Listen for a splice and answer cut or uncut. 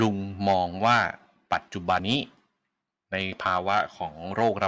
cut